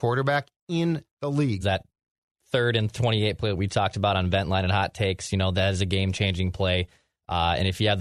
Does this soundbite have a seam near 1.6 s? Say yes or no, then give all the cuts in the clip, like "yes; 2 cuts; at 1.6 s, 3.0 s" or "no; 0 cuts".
yes; 1 cut; at 1.6 s